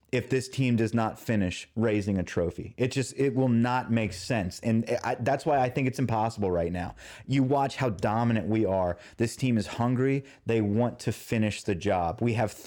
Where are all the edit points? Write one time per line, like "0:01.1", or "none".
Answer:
none